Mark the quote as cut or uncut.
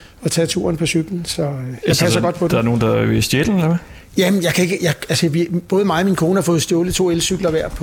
uncut